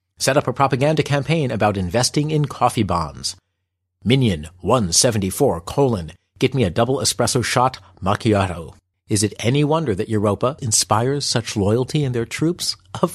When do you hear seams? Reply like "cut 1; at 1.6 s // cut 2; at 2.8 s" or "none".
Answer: cut 1; at 8.9 s // cut 2; at 10.6 s